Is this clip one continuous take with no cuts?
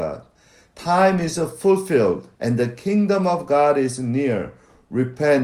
no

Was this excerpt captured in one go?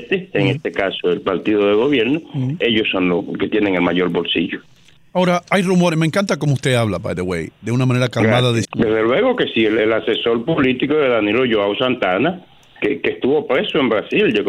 no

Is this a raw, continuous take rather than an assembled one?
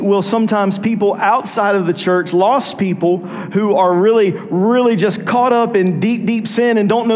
yes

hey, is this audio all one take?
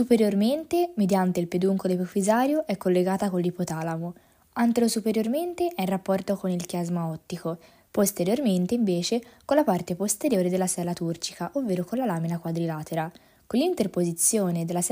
yes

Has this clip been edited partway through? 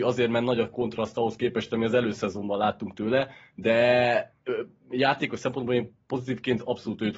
no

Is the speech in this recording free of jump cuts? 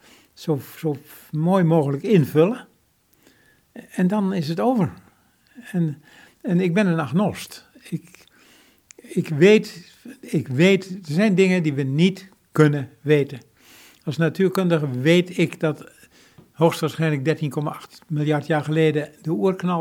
yes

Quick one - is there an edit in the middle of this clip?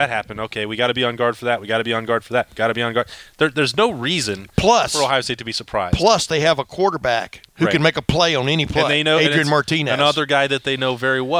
no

